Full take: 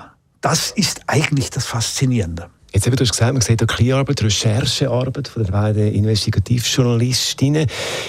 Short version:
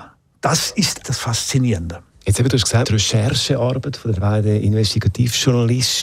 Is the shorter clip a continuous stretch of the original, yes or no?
no